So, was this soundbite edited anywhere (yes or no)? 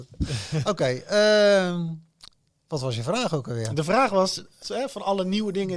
yes